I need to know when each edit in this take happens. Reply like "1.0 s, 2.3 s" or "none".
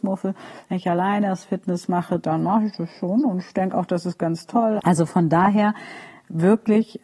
4.8 s